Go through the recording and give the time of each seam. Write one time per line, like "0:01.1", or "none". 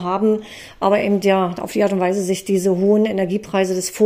none